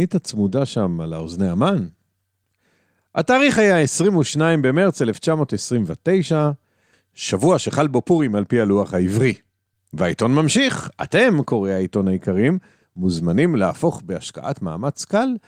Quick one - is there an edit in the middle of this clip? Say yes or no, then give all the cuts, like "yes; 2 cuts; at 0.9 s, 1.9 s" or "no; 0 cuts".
yes; 1 cut; at 9.7 s